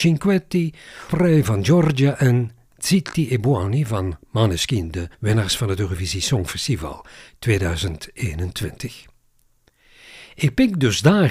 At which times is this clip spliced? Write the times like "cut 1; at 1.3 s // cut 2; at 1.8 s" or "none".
cut 1; at 1.1 s // cut 2; at 5.1 s